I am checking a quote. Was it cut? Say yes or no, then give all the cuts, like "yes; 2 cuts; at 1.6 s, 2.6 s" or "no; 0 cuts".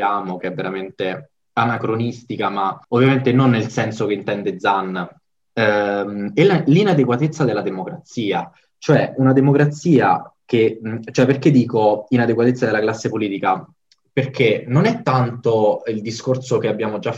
yes; 2 cuts; at 2.8 s, 5.5 s